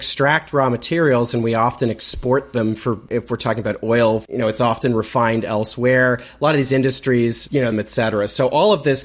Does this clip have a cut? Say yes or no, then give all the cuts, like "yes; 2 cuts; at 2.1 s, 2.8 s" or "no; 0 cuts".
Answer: yes; 1 cut; at 7.7 s